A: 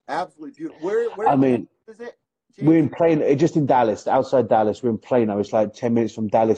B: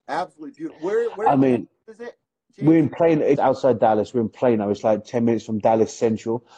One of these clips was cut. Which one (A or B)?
B